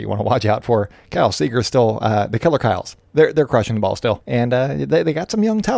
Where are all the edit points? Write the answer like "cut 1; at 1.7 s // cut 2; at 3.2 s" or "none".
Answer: none

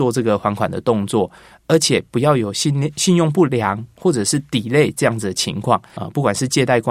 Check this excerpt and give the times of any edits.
cut 1; at 6.0 s

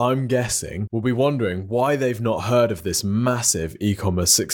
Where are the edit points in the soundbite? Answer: none

